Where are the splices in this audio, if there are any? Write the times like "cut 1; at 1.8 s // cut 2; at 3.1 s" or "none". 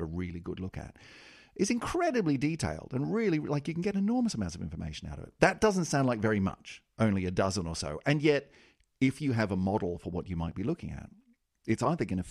none